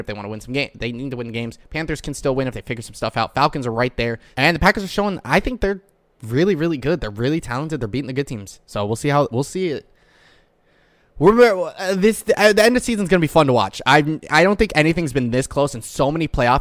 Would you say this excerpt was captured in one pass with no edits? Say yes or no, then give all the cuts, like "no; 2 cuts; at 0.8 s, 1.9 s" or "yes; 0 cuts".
no; 1 cut; at 4.3 s